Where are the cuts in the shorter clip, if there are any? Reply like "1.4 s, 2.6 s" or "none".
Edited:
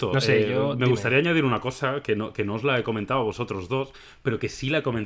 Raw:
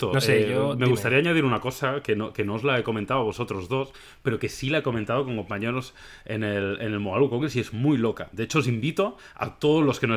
none